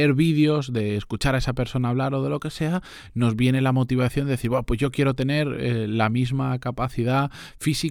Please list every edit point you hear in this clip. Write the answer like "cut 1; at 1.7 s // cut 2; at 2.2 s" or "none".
none